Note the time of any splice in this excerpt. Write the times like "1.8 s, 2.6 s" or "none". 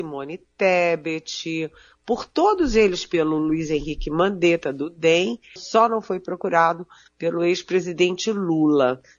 5.6 s